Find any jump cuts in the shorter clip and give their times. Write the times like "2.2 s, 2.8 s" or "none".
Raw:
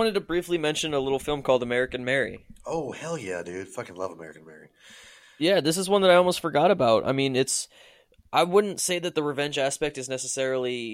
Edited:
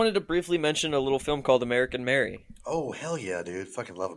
none